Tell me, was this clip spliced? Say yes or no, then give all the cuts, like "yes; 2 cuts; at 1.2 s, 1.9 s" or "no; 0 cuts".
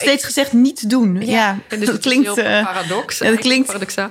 yes; 1 cut; at 1.7 s